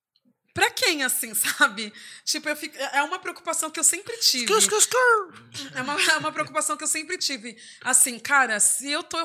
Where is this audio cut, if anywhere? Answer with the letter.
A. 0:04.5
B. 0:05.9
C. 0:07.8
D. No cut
D